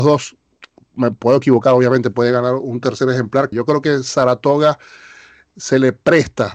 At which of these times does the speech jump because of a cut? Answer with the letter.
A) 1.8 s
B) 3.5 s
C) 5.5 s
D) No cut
B